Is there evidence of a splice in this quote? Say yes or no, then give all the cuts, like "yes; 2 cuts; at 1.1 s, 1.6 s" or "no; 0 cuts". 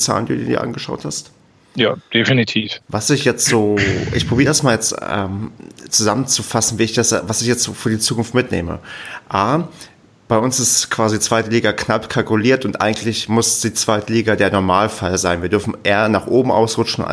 yes; 1 cut; at 2.8 s